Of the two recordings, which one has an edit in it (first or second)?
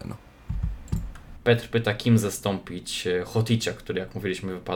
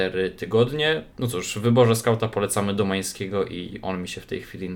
first